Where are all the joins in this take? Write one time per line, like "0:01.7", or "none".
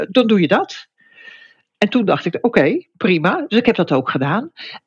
none